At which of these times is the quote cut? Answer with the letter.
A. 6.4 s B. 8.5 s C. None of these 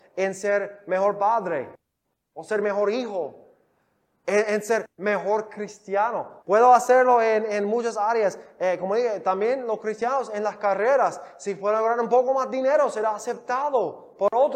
A